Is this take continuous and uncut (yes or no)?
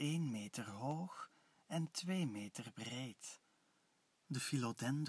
no